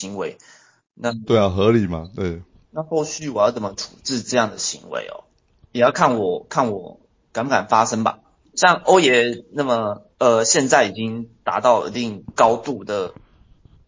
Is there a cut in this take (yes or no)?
no